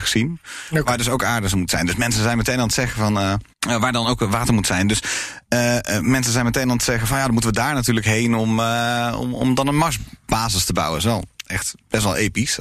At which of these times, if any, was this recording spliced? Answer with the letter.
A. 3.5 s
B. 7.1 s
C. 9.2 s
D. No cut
A